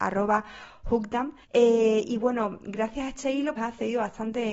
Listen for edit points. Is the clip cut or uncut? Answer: cut